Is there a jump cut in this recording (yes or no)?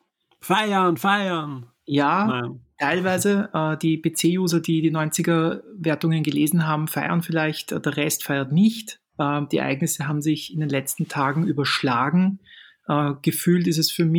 no